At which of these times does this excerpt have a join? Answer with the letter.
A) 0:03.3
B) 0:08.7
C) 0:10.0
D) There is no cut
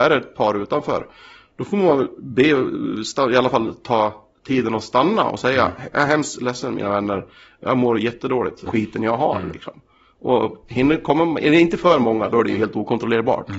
B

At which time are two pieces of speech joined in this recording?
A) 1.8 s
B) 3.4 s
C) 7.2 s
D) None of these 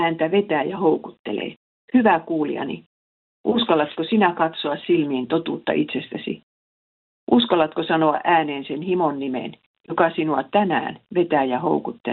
A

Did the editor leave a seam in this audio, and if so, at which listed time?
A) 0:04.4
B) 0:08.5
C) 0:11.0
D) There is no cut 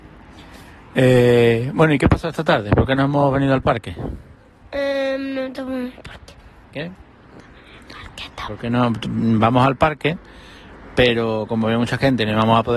B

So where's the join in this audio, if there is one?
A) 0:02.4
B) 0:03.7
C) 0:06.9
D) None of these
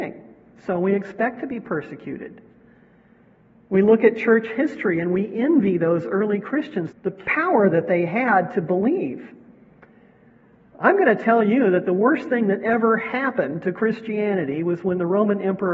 C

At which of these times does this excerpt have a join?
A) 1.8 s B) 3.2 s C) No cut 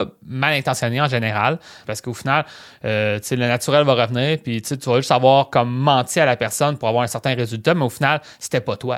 A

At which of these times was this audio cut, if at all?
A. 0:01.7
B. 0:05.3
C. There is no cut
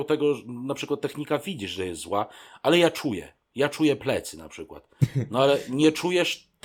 C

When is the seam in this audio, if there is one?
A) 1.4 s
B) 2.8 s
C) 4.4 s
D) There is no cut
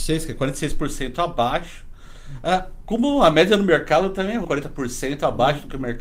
C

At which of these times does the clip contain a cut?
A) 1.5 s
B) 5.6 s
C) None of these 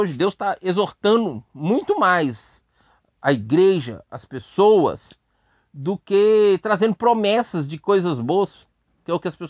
C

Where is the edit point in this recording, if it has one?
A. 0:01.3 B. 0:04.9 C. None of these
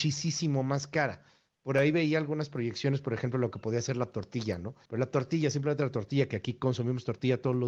B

